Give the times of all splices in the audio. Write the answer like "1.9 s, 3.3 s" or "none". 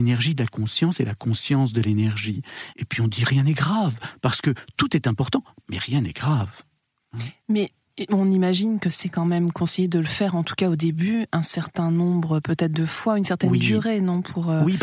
2.7 s